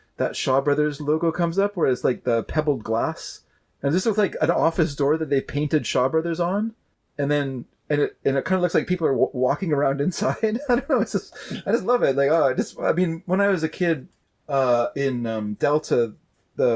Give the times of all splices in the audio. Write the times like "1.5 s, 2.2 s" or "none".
none